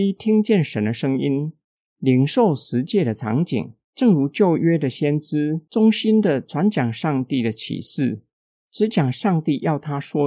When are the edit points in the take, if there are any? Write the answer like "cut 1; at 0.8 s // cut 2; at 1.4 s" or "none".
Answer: cut 1; at 3.9 s